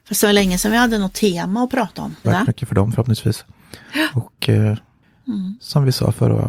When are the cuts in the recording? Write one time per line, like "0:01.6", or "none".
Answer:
0:02.2

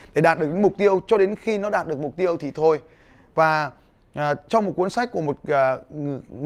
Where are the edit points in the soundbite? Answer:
none

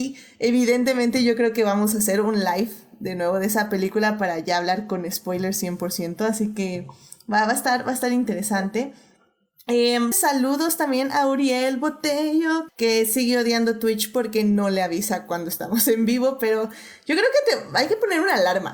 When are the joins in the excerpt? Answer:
0:10.1
0:12.7

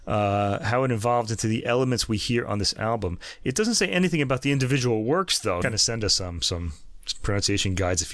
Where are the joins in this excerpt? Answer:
0:05.6

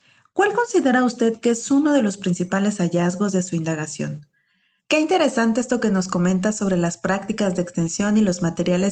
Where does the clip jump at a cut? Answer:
0:04.8

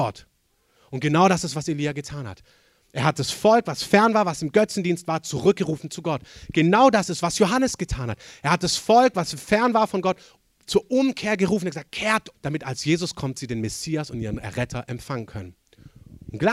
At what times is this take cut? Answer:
0:12.3

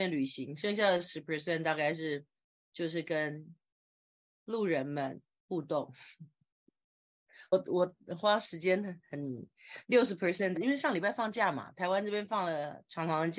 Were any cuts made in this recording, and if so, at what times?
0:07.5
0:10.5

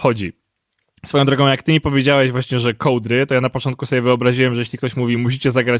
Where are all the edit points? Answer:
none

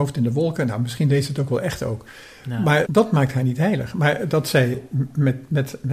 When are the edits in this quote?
0:02.9

